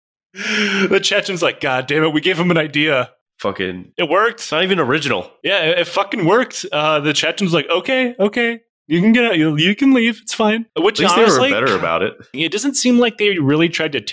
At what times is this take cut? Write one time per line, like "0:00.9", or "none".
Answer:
0:10.7
0:12.3